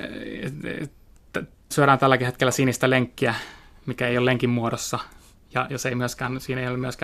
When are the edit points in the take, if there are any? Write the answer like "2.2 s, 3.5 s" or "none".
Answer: 1.7 s

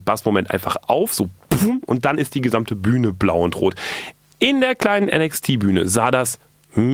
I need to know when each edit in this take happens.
none

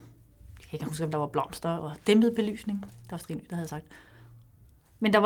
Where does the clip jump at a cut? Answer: none

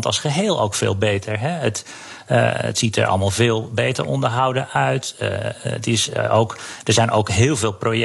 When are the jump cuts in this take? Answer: none

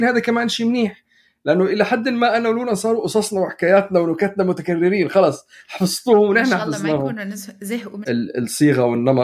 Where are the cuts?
8.0 s

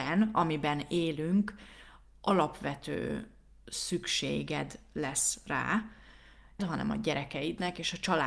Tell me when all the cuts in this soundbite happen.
6.6 s

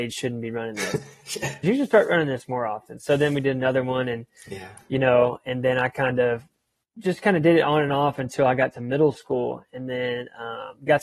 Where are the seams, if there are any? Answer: 1.6 s

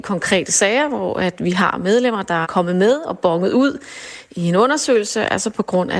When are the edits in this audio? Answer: 2.4 s

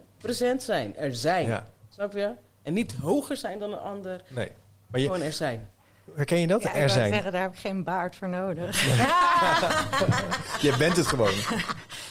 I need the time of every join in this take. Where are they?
none

